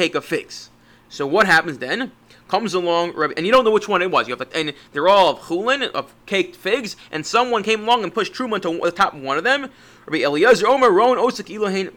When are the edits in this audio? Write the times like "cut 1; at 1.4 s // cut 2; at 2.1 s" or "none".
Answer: cut 1; at 4.5 s